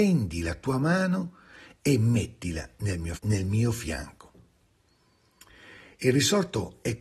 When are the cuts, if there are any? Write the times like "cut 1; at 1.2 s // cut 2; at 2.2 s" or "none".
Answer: cut 1; at 3.2 s